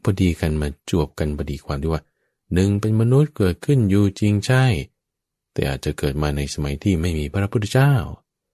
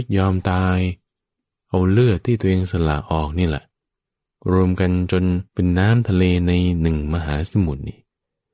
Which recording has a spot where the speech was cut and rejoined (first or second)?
second